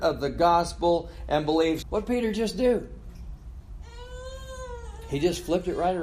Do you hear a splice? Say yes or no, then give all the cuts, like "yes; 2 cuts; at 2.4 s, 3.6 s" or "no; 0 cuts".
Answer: yes; 1 cut; at 1.8 s